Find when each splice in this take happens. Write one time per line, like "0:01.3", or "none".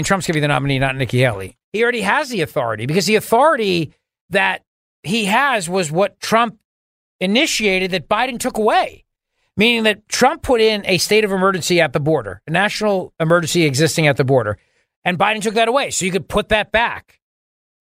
0:01.6